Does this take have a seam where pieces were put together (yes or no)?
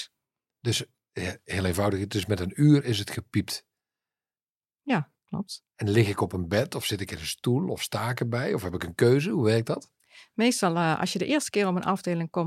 no